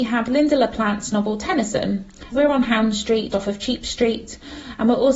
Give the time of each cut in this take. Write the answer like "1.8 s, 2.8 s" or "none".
2.3 s, 3.3 s